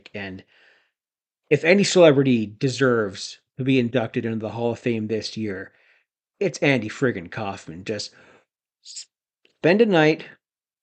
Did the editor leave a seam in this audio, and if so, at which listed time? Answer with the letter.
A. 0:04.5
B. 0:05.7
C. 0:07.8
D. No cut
D